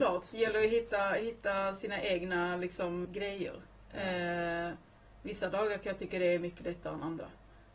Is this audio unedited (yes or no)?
no